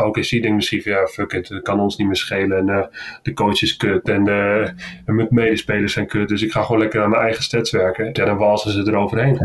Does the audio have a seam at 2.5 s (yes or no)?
no